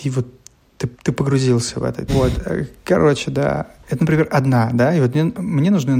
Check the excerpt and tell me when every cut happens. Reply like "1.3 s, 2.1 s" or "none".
0.9 s, 2.1 s